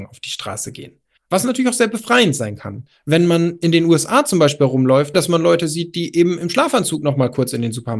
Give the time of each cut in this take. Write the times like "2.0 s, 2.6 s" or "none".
1.2 s, 5.1 s